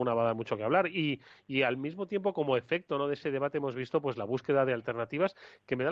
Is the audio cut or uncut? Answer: uncut